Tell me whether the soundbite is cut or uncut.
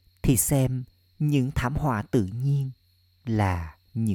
uncut